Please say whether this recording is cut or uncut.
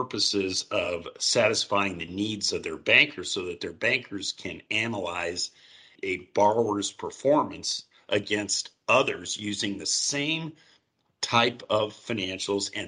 cut